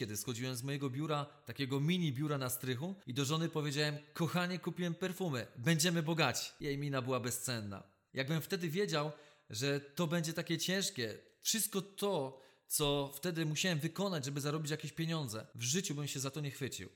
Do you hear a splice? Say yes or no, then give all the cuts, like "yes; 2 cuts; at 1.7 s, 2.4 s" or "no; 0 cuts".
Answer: no; 0 cuts